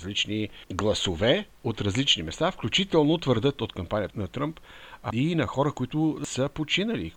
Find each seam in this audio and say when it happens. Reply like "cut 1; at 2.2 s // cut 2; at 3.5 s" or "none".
cut 1; at 4.1 s